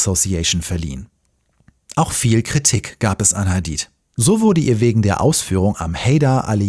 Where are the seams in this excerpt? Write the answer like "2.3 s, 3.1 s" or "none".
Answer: none